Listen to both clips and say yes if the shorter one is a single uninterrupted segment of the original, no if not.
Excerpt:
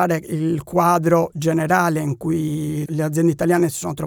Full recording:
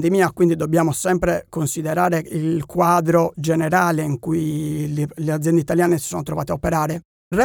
no